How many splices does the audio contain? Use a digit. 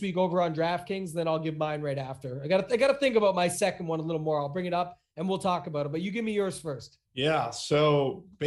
1